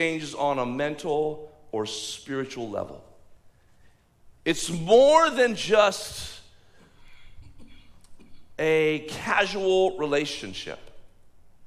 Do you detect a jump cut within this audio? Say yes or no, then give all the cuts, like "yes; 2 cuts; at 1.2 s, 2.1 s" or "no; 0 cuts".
no; 0 cuts